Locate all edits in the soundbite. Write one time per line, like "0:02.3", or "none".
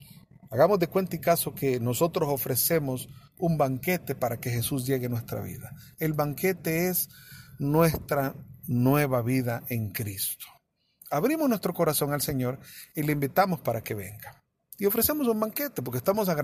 none

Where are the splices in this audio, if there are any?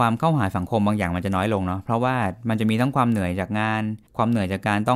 0:04.1

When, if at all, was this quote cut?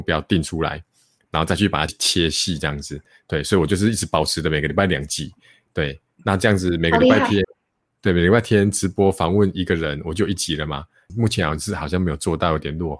0:01.9
0:07.4
0:11.1

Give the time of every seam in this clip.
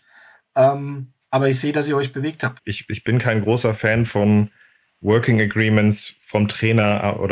0:02.6

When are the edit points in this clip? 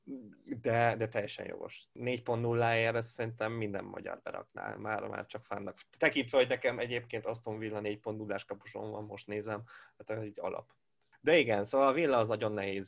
none

